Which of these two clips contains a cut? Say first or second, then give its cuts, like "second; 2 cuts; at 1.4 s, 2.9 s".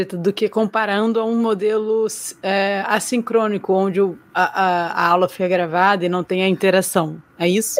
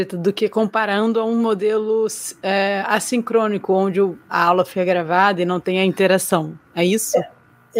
second; 1 cut; at 4.3 s